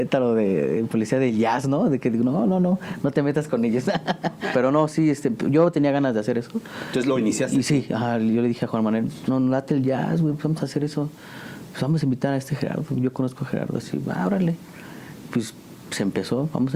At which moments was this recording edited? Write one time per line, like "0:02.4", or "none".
0:04.5
0:09.3